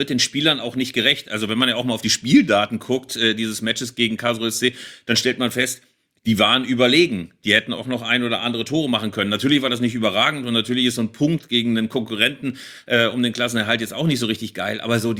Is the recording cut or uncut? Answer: uncut